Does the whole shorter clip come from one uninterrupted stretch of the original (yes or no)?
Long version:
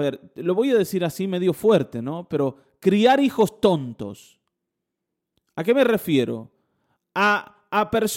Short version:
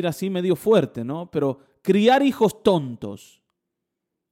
yes